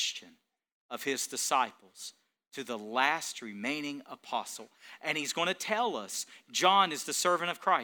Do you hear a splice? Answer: yes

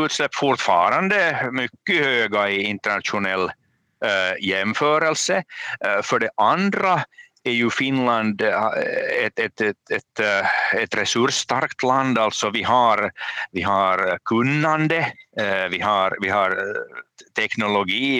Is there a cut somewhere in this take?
no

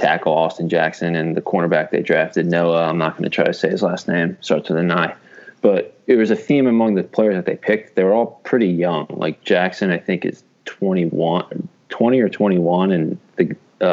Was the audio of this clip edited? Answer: no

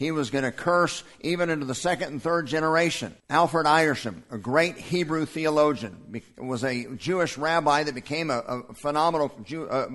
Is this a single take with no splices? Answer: no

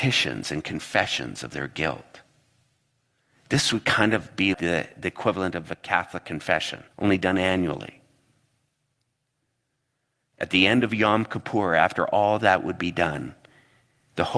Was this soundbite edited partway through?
yes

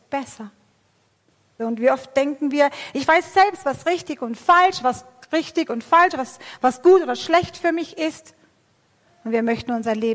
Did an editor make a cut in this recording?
yes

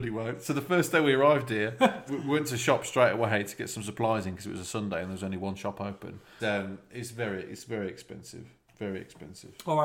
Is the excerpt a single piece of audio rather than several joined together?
no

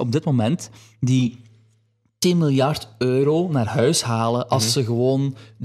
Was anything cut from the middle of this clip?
no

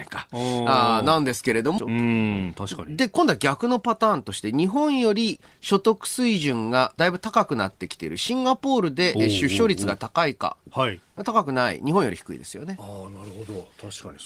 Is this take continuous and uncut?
no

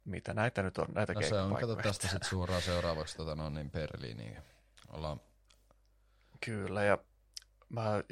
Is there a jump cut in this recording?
no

